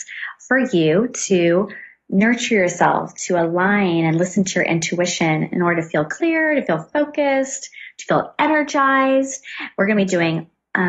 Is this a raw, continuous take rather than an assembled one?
yes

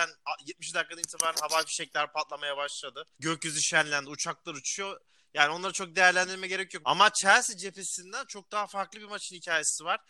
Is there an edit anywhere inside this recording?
yes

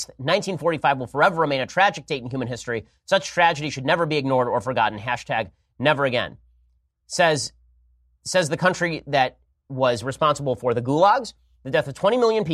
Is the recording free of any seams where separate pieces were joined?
yes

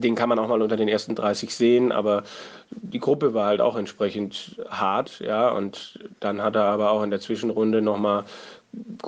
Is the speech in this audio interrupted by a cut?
no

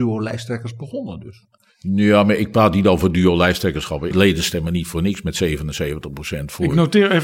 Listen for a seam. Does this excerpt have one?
yes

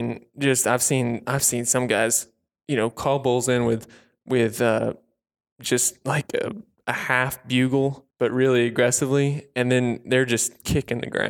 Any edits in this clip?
yes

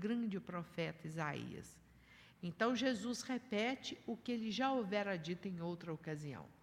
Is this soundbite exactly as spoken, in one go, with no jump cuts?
no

